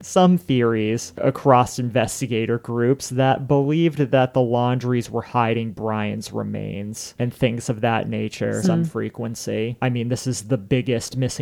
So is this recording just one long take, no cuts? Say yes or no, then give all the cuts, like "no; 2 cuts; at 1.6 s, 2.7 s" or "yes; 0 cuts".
no; 1 cut; at 8.6 s